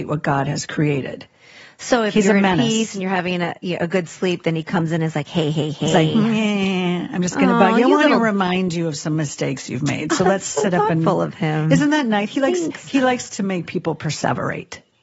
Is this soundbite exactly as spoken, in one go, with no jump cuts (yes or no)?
yes